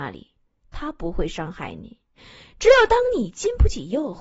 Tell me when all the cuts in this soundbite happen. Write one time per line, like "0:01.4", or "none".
none